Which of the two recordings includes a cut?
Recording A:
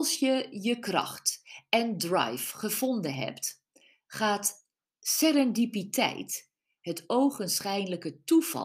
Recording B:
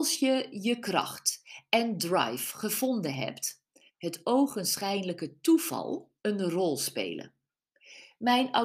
B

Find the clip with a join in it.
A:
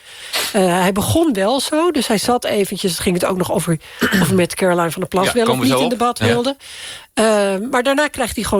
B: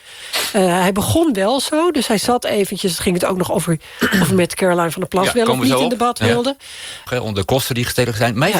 B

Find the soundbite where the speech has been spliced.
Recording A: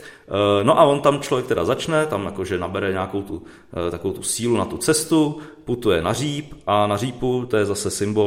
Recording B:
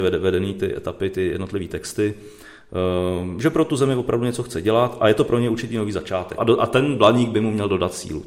B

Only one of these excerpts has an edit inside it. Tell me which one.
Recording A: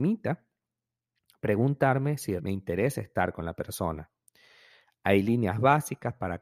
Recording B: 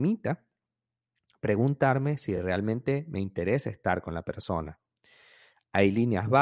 A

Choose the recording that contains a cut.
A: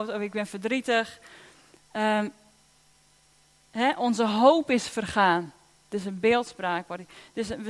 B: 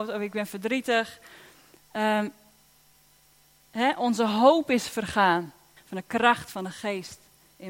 B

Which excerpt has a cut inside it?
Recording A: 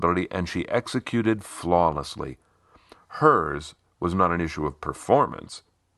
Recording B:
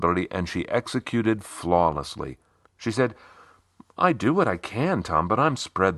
B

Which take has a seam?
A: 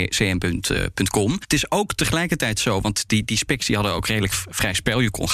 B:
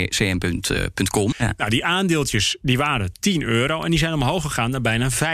B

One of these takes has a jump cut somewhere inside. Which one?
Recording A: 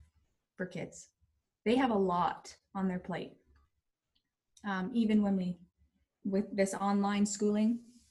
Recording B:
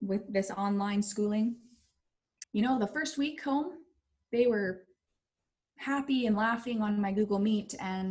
B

